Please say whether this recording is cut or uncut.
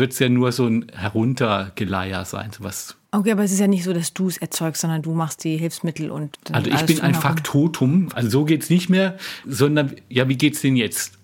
cut